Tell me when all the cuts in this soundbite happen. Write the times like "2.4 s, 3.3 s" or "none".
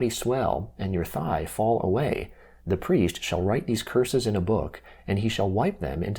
2.6 s